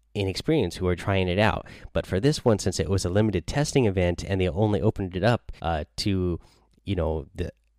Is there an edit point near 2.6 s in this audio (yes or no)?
no